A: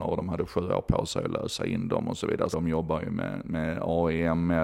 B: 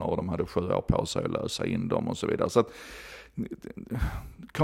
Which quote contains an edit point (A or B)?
A